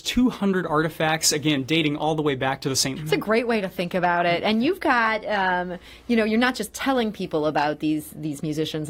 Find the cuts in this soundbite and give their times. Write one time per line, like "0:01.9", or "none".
0:03.0